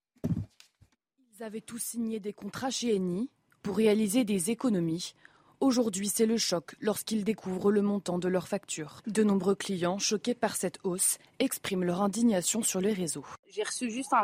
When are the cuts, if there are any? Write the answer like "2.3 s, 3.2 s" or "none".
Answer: 3.6 s